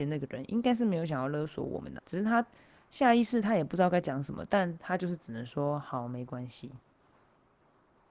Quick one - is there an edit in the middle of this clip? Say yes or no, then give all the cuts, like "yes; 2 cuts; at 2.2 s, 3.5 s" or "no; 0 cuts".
yes; 1 cut; at 2.0 s